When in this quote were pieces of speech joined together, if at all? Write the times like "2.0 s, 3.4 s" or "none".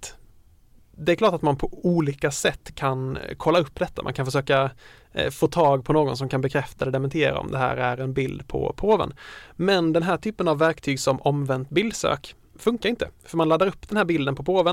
2.7 s